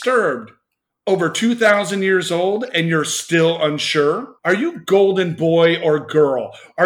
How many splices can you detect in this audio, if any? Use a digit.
1